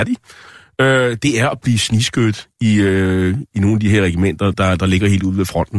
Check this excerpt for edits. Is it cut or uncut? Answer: uncut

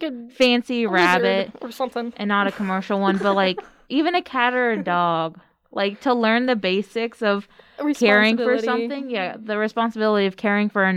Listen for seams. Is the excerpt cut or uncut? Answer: uncut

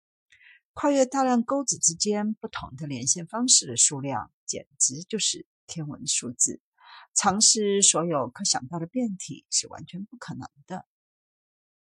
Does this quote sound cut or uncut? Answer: uncut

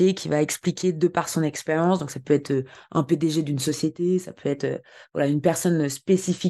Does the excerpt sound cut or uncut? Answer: uncut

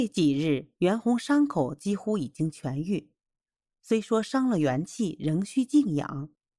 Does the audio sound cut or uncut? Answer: uncut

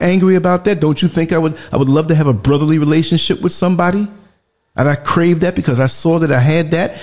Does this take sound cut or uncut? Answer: uncut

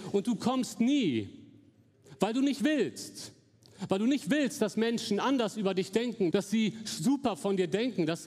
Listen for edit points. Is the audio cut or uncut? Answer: cut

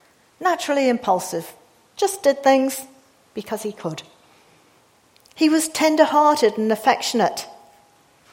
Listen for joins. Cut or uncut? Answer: uncut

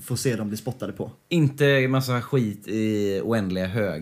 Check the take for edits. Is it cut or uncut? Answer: uncut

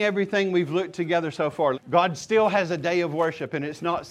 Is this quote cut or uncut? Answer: cut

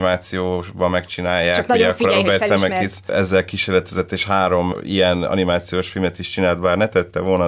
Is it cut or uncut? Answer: uncut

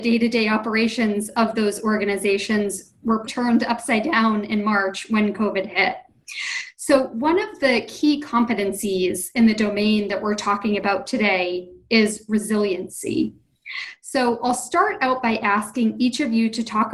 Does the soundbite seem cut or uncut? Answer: cut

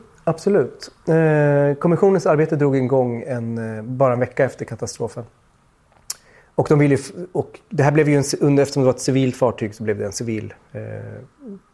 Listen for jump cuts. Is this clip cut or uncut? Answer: uncut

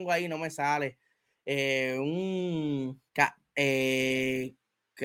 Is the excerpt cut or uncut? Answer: cut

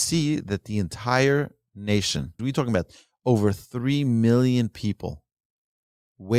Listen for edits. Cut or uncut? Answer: cut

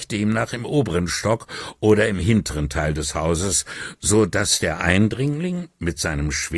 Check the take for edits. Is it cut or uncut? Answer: uncut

